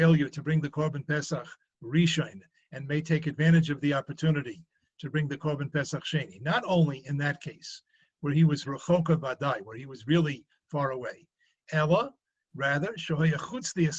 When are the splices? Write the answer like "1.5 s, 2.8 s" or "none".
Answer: none